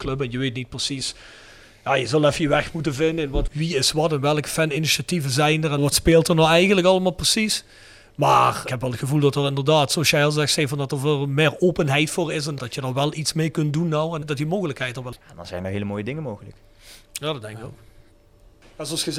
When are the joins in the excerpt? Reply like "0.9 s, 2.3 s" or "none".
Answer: 15.2 s